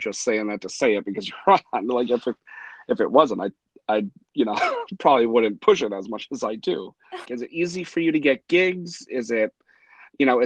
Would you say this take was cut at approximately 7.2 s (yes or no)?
yes